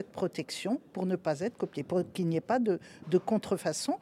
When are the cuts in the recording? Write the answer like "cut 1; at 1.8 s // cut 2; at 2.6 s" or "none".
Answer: none